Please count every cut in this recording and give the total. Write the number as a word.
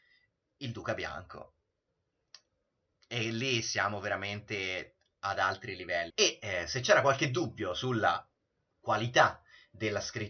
one